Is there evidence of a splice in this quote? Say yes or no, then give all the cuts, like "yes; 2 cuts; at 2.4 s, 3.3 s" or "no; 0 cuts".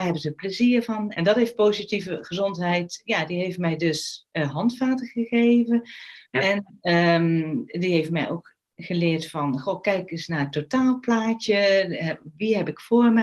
yes; 2 cuts; at 1.1 s, 6.2 s